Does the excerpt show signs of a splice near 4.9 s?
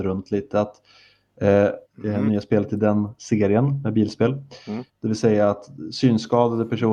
yes; 2 cuts; at 1.8 s, 4.9 s

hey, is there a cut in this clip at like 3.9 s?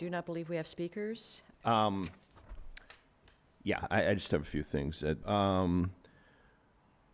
no; 2 cuts; at 1.5 s, 5.2 s

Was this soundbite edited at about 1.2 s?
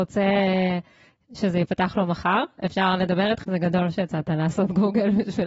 no; 1 cut; at 3.4 s

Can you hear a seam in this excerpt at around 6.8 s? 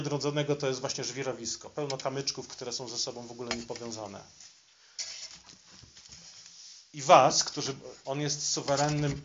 no; 1 cut; at 8.0 s

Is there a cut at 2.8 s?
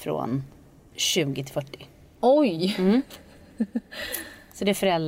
no; 1 cut; at 0.9 s

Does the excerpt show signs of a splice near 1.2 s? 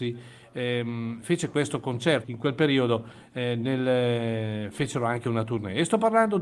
yes; 2 cuts; at 1.2 s, 2.2 s

